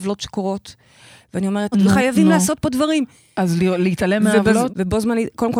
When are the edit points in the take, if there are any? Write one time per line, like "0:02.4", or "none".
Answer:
0:01.7
0:04.7